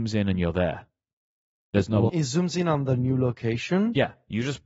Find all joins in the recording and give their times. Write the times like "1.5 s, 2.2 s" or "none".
2.1 s